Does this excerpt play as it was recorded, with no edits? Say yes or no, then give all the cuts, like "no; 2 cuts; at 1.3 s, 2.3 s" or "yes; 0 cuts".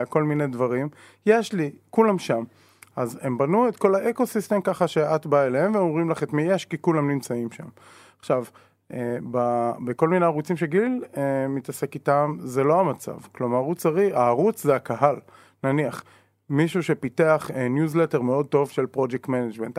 yes; 0 cuts